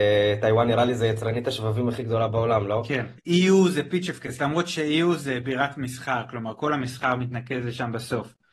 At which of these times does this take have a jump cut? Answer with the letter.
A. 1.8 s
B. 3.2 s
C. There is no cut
B